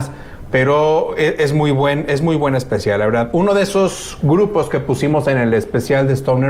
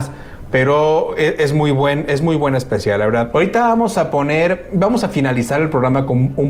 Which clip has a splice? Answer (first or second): second